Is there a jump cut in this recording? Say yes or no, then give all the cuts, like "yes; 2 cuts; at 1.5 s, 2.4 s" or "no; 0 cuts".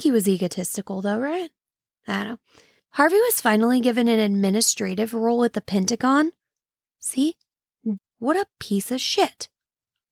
yes; 1 cut; at 8.0 s